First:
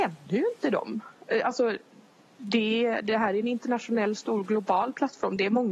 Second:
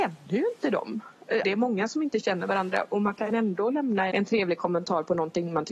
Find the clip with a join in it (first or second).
second